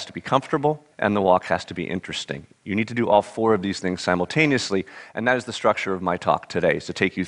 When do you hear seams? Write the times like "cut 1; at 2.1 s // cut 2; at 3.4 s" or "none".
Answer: cut 1; at 0.9 s